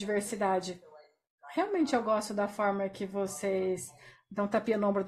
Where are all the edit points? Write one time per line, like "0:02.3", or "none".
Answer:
none